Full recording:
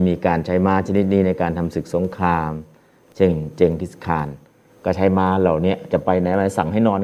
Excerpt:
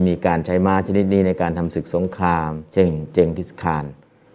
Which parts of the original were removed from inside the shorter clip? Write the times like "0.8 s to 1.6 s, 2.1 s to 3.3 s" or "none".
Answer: 2.7 s to 3.1 s

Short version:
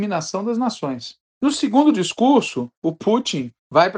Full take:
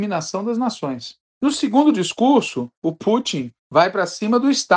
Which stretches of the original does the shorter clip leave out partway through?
none

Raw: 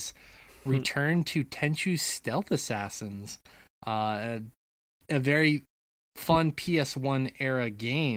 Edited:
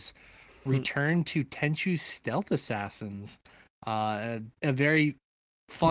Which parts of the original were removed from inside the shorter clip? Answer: 4.6 s to 5.0 s

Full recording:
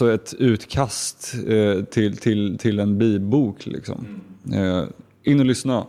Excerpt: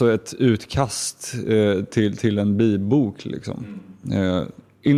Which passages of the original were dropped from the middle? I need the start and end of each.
2.2 s to 2.6 s

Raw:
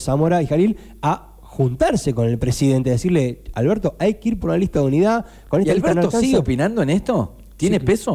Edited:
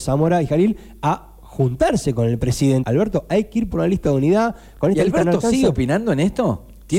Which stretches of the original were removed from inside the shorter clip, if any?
2.8 s to 3.5 s

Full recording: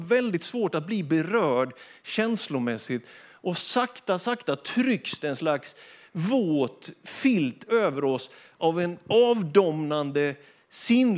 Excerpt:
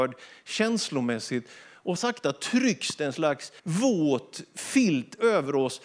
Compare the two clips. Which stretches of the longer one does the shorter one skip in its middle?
3.5 s to 4.2 s, 5.8 s to 6.1 s

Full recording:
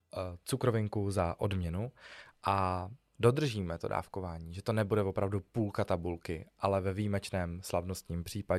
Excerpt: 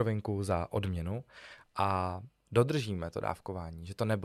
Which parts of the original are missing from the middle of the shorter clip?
none

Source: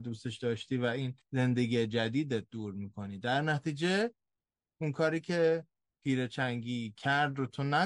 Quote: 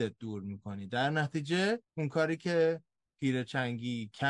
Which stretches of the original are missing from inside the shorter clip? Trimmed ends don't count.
4.2 s to 4.7 s

